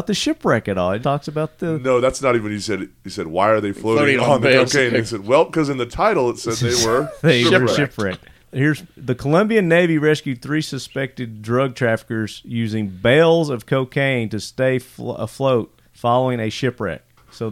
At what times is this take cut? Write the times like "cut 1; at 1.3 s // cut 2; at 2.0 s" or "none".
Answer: cut 1; at 1.0 s // cut 2; at 8.4 s // cut 3; at 15.9 s

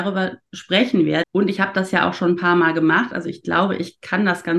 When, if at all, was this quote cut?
cut 1; at 1.2 s

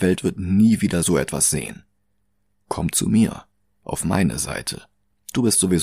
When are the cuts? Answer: none

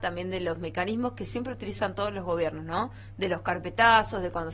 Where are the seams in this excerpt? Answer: none

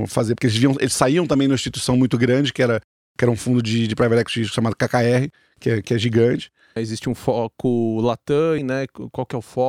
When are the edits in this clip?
cut 1; at 6.8 s // cut 2; at 8.6 s

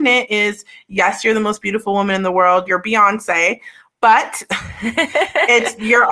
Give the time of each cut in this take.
cut 1; at 2.7 s

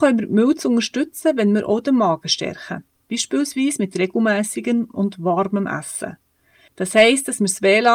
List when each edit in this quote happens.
cut 1; at 6.7 s

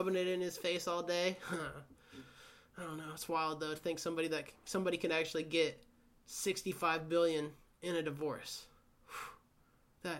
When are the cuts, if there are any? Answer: none

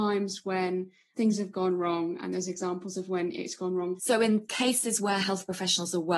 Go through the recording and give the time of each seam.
cut 1; at 1.1 s // cut 2; at 4.0 s

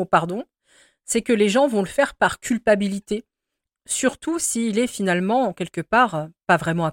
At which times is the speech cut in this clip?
cut 1; at 3.6 s

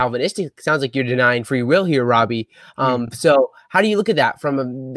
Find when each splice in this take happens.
none

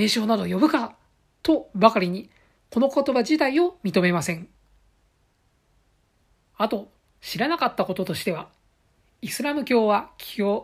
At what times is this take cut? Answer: cut 1; at 6.5 s

